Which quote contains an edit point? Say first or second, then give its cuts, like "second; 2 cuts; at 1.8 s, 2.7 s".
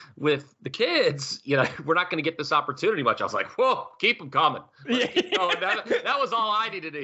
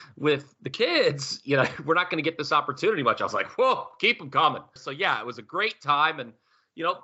second; 1 cut; at 4.8 s